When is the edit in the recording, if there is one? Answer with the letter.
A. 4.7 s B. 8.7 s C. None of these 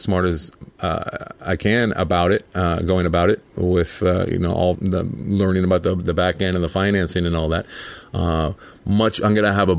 A